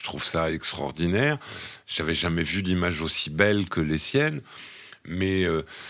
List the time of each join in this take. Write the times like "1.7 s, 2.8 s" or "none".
none